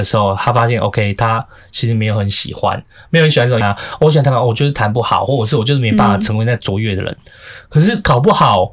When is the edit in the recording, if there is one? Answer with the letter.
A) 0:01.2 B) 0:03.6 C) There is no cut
B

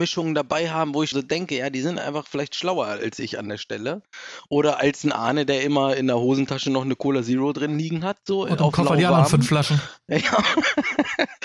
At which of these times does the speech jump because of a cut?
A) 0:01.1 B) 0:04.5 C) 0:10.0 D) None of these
A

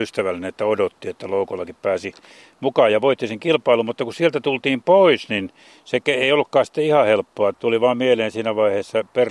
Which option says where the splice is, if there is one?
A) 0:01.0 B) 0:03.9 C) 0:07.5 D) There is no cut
C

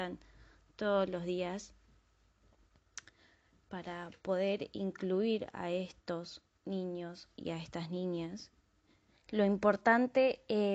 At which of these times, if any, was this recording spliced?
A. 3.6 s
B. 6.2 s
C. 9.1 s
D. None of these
C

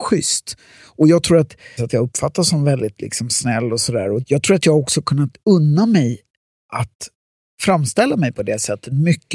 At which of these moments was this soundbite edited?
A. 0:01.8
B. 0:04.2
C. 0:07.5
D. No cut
A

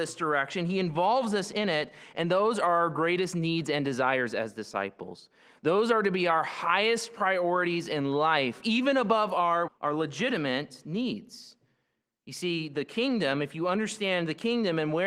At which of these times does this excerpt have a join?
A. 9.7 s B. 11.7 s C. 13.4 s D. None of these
A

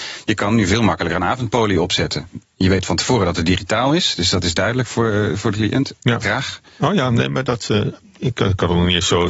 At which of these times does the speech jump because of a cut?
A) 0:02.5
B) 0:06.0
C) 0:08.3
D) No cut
B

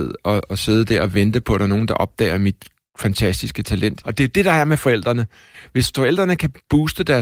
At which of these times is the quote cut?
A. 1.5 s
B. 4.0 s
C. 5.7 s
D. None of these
B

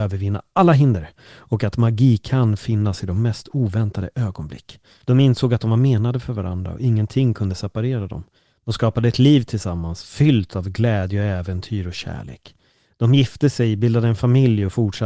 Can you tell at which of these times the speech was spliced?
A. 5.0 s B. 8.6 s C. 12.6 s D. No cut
A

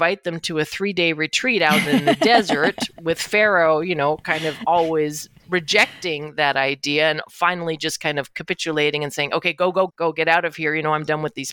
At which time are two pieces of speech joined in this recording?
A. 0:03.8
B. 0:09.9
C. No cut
B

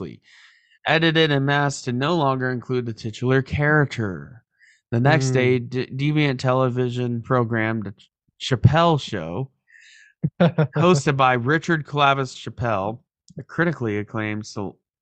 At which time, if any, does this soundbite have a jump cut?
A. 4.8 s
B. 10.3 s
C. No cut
C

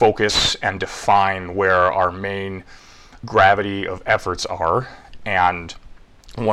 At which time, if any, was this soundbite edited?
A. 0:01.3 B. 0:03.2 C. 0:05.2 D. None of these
D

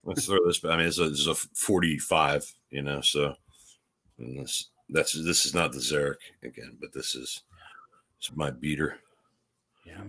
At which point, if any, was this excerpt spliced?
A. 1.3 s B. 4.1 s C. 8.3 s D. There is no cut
C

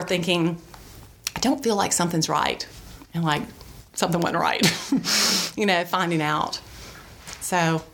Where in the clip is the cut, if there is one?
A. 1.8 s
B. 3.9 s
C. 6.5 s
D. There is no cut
B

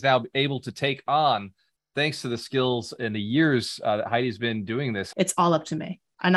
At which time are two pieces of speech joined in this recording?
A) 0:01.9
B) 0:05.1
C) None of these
B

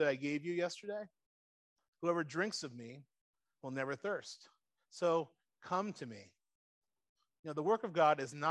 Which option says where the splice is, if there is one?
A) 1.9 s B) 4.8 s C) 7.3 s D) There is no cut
A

